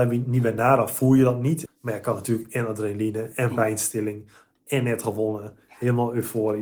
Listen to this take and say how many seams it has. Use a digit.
1